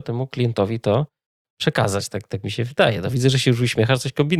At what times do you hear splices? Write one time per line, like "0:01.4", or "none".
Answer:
none